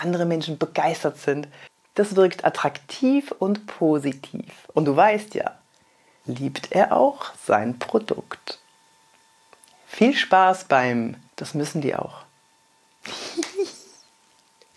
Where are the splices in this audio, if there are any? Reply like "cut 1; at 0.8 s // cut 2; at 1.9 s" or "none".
cut 1; at 6.2 s // cut 2; at 11.3 s